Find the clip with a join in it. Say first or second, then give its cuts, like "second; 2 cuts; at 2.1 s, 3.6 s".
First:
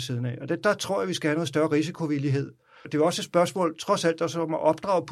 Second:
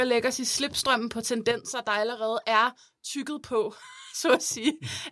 first; 1 cut; at 2.8 s